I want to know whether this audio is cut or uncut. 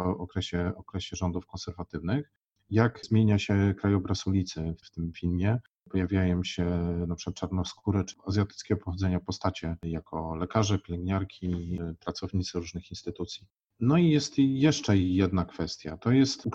uncut